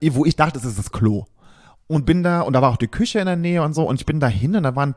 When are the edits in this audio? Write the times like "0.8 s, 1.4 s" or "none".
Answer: none